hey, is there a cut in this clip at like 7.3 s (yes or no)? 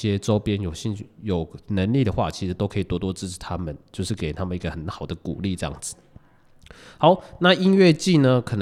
no